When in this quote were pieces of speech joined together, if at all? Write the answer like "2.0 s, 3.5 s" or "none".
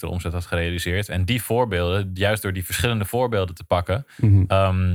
1.1 s